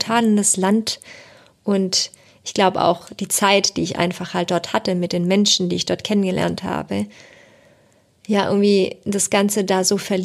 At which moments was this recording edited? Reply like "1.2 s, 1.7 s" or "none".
none